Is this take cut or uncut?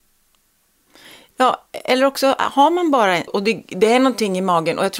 cut